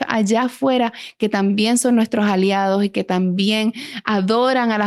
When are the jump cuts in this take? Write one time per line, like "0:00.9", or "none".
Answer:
none